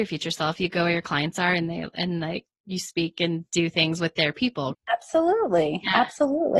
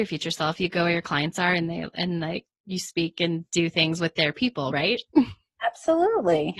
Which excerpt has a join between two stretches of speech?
first; 1 cut; at 4.7 s

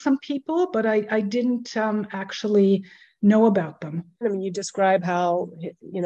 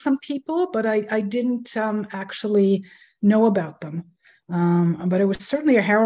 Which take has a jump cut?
first; 1 cut; at 4.2 s

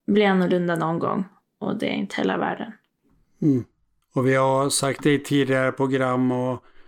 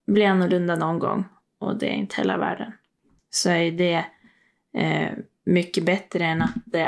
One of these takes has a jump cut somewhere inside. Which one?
second; 1 cut; at 3.2 s

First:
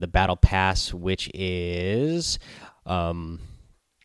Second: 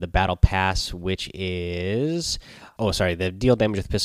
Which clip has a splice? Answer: second; 1 cut; at 2.8 s

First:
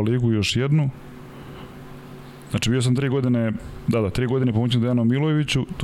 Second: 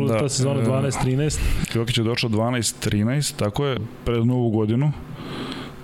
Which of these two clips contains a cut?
second; 1 cut; at 3.8 s

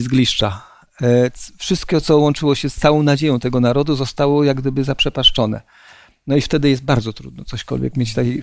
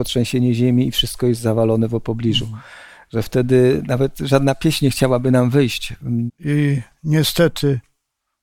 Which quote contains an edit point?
second; 1 cut; at 6.3 s

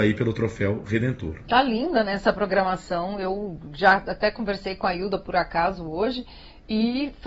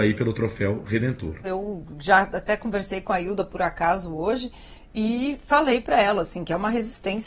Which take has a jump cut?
second; 1 cut; at 1.4 s

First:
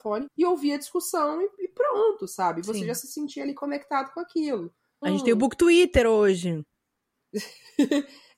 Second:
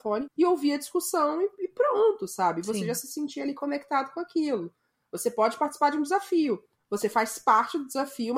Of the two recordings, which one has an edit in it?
first; 1 cut; at 5.0 s

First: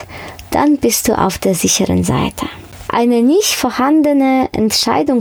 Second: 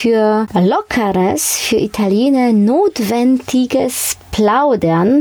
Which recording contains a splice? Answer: first; 1 cut; at 2.9 s

